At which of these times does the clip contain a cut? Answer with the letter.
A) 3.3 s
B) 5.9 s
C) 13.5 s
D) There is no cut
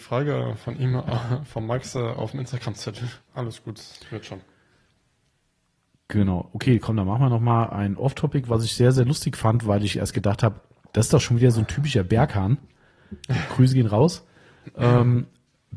A